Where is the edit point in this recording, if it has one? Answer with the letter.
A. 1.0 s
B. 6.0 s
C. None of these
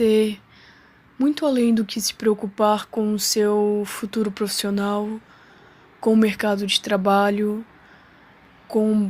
C